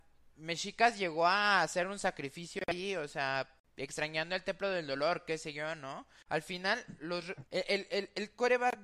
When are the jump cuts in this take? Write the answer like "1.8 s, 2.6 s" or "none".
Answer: 6.3 s, 7.4 s